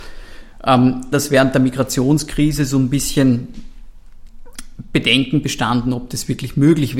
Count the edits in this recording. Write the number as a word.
one